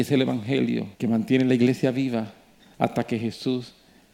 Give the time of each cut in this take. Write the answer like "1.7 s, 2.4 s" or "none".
0.9 s